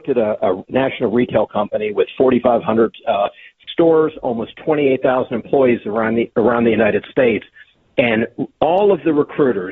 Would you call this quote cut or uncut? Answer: uncut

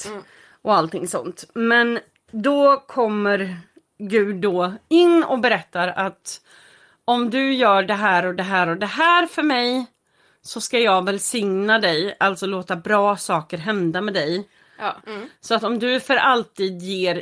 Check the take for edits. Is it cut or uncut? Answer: cut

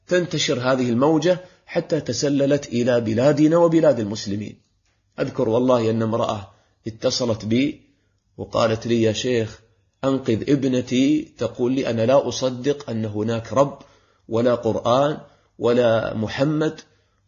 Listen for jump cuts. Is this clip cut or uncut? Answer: cut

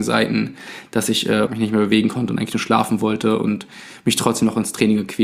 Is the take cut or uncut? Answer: cut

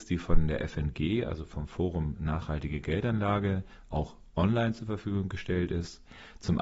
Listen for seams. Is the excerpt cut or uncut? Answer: uncut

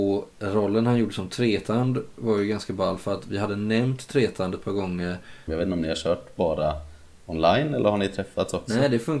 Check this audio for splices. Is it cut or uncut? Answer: cut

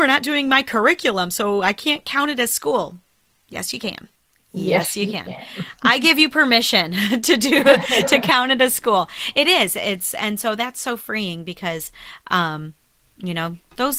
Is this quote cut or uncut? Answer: uncut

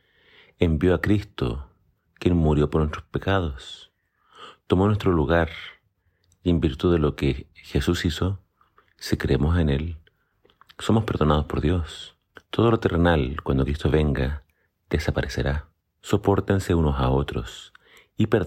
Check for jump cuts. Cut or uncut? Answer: cut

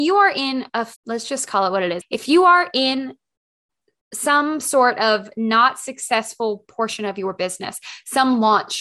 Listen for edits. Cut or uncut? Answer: cut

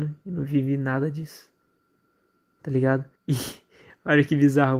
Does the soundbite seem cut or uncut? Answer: cut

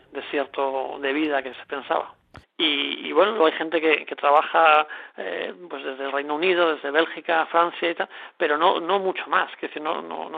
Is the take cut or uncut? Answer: cut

